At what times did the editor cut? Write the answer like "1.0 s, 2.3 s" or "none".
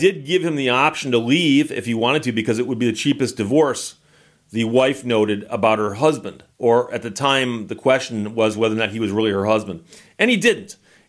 6.5 s